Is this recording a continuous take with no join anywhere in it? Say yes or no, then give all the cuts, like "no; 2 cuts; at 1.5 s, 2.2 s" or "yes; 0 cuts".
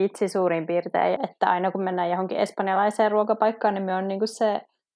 no; 1 cut; at 1.2 s